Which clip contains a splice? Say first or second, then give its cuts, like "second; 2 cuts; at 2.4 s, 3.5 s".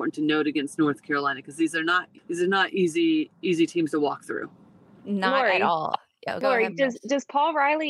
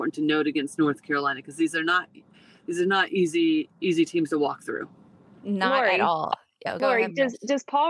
first; 1 cut; at 2.2 s